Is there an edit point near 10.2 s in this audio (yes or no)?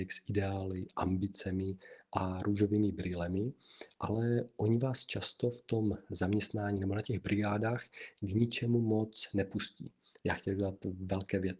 yes